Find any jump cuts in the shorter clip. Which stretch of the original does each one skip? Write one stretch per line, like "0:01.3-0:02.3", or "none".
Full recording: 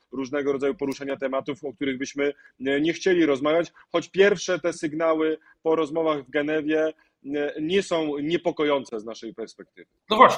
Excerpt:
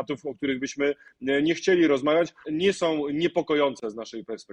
0:03.8-0:07.5